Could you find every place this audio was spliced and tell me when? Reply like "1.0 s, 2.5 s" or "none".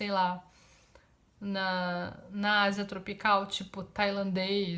none